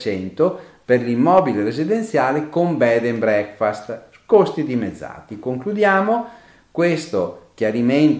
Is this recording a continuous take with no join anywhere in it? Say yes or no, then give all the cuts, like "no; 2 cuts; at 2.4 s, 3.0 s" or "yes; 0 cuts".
yes; 0 cuts